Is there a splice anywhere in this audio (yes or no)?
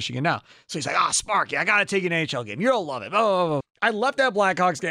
yes